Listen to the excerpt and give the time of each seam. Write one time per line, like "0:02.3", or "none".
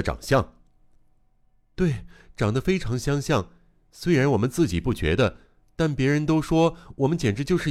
none